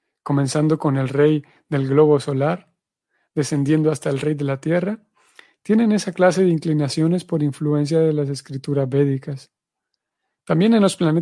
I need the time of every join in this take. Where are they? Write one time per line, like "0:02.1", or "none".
none